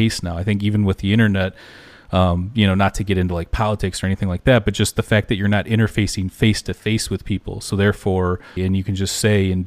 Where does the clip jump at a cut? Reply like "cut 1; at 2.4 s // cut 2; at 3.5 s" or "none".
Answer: cut 1; at 8.6 s